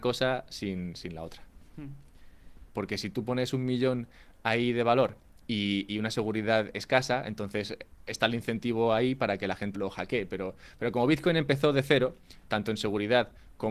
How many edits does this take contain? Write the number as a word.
two